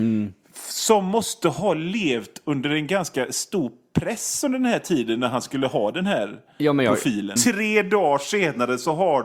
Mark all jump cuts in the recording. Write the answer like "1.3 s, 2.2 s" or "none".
7.4 s